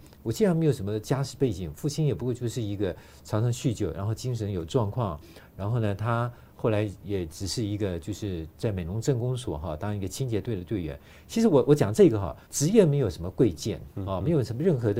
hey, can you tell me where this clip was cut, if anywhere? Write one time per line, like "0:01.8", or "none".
0:12.4

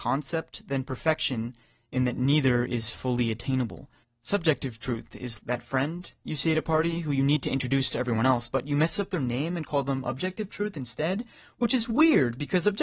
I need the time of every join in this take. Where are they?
0:04.0
0:05.4

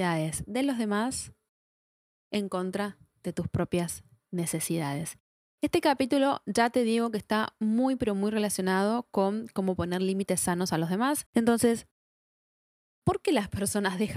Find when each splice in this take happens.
0:11.3

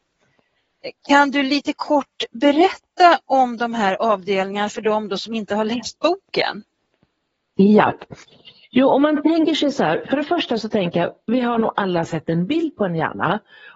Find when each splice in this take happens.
none

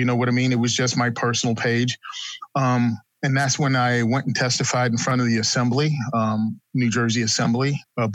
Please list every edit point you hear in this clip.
none

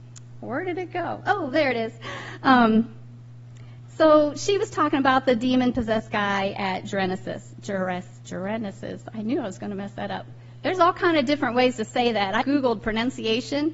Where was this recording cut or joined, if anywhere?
0:12.4

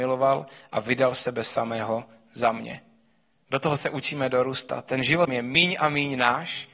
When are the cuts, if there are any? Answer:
0:05.3

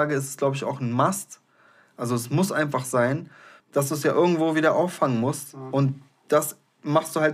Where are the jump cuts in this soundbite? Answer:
0:03.6

